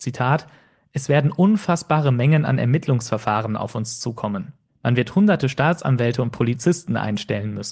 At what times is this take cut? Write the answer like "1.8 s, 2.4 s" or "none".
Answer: 4.7 s